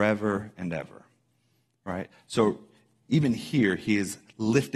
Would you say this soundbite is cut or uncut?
uncut